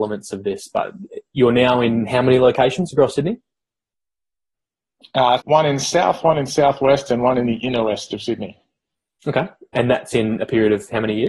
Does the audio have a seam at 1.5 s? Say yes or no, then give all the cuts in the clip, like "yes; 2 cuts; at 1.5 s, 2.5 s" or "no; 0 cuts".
no; 1 cut; at 5.4 s